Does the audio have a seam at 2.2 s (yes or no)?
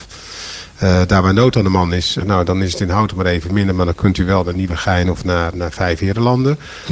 yes